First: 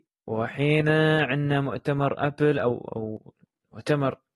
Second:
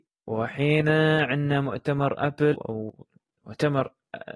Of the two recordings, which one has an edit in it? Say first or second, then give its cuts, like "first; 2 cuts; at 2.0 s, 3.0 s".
second; 1 cut; at 2.5 s